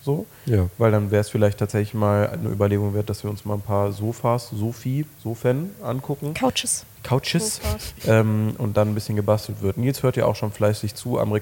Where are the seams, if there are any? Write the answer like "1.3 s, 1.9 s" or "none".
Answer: none